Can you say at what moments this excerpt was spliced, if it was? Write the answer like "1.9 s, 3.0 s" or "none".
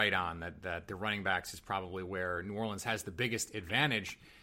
none